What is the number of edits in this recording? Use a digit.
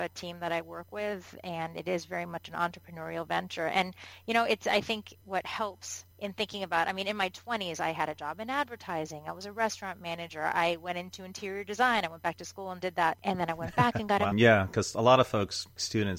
2